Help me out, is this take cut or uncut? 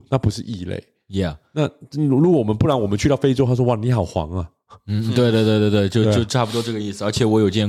uncut